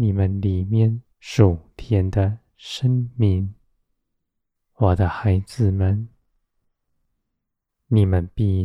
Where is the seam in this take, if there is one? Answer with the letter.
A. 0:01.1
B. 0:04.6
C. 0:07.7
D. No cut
A